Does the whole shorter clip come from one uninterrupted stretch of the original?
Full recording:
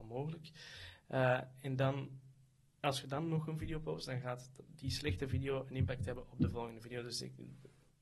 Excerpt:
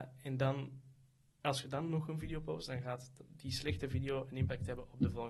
yes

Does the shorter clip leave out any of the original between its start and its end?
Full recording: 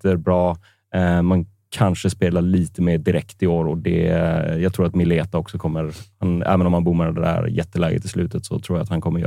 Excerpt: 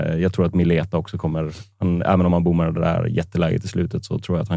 no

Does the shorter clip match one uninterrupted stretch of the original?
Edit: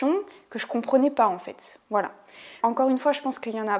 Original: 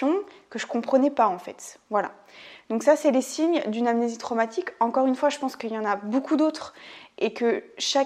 no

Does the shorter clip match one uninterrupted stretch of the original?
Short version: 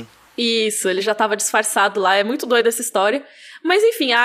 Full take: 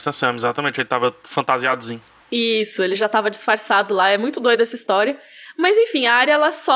yes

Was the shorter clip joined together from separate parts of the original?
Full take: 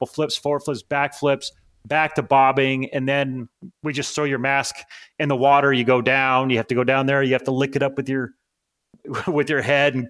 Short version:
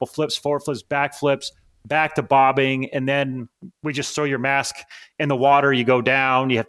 no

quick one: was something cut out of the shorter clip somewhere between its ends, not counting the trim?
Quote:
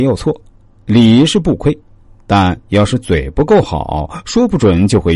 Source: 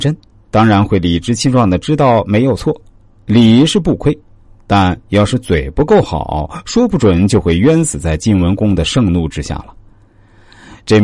no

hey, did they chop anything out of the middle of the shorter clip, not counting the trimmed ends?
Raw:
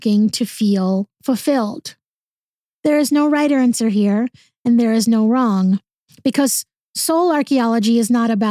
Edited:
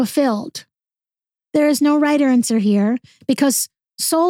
yes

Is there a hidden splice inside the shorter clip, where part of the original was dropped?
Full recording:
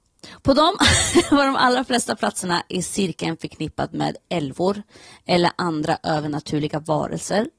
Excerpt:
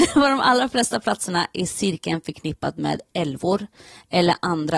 no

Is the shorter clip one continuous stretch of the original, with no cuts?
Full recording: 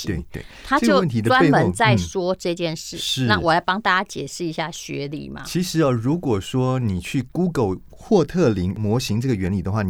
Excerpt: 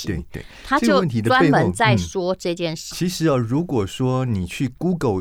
no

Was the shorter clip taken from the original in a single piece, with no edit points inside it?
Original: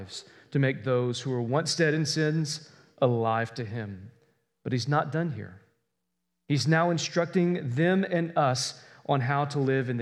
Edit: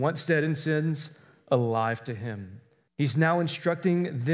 no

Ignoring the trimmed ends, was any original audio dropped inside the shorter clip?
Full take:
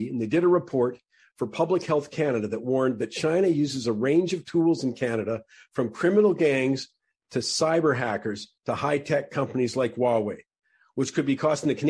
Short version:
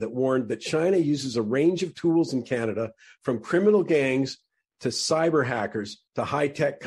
no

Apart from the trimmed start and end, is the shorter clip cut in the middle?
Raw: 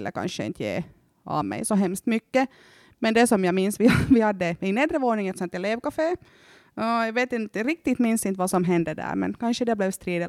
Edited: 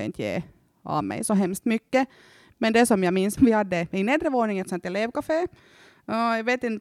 yes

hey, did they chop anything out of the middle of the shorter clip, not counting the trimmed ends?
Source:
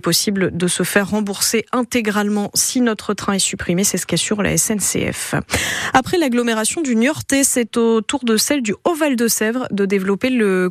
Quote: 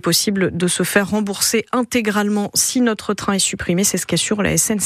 no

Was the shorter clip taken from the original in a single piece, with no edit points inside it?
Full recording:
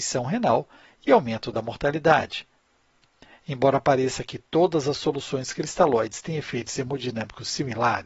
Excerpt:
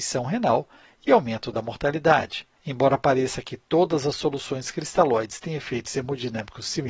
no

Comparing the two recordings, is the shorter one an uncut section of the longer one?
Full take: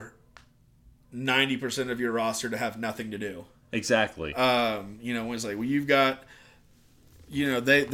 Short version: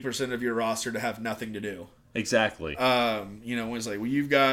yes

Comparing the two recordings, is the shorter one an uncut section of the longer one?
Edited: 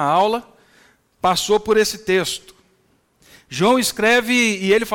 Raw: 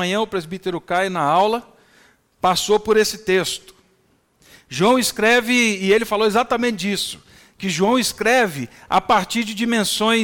yes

